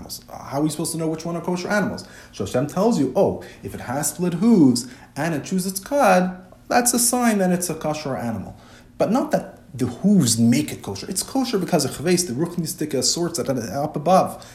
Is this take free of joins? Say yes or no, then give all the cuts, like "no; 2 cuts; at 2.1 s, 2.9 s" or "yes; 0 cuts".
yes; 0 cuts